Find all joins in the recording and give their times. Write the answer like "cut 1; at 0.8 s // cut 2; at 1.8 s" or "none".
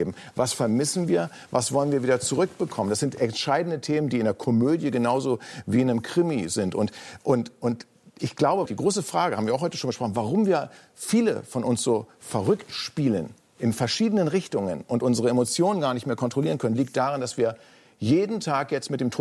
cut 1; at 8.7 s

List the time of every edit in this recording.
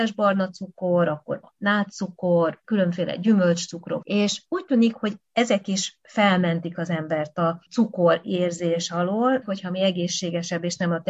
cut 1; at 4.0 s // cut 2; at 9.4 s

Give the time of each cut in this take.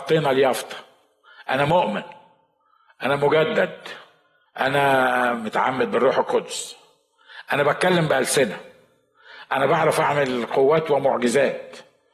cut 1; at 4.5 s

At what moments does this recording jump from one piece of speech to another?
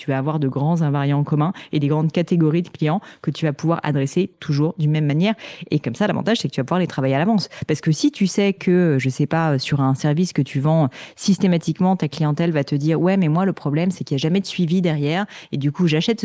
cut 1; at 4.3 s // cut 2; at 5.7 s

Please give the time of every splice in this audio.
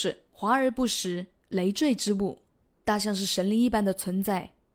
cut 1; at 2.7 s

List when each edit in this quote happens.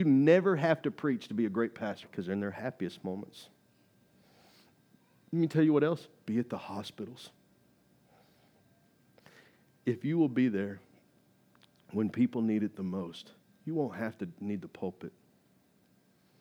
cut 1; at 2.0 s

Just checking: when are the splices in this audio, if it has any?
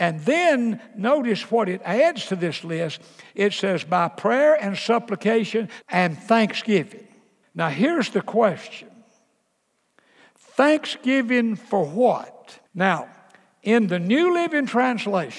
cut 1; at 5.8 s // cut 2; at 7.4 s // cut 3; at 12.7 s

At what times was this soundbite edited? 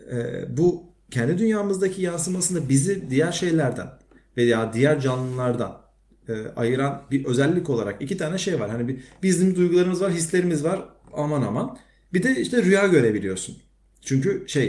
none

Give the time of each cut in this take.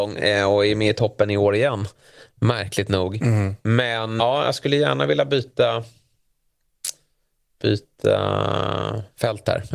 cut 1; at 4.2 s

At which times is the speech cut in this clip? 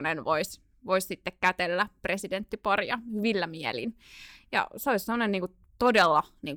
none

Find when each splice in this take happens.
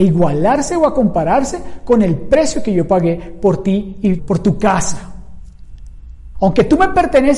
cut 1; at 4.2 s // cut 2; at 6.3 s

